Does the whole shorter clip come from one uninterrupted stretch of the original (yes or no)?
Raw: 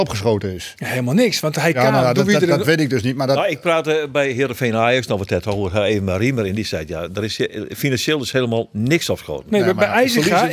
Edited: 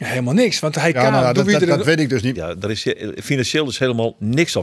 no